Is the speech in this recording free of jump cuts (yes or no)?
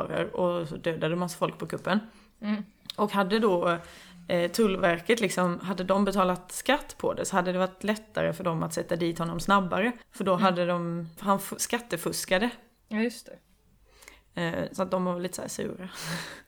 no